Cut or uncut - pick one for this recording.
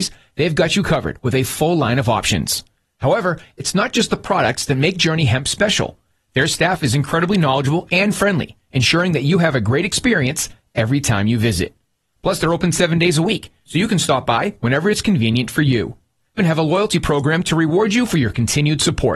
cut